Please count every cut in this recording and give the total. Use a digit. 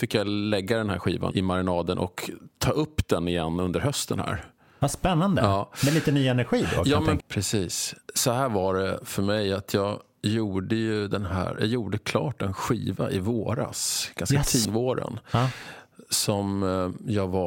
3